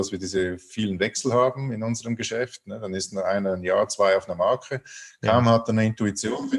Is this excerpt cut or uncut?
uncut